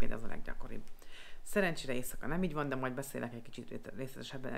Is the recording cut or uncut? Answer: uncut